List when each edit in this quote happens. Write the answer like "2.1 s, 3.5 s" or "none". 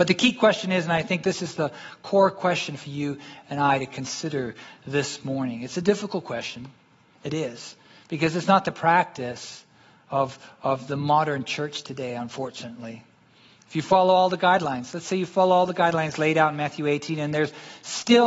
none